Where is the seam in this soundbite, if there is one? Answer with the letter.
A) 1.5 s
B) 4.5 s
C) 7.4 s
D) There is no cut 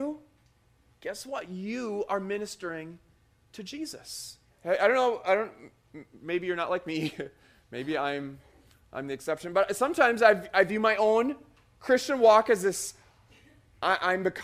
B